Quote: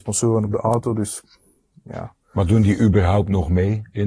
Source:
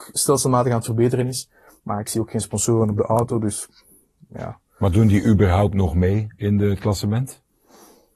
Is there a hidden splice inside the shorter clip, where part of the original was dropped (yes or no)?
no